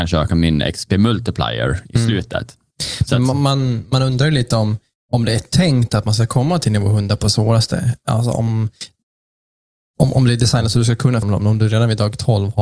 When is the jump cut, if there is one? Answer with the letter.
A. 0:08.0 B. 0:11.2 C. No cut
B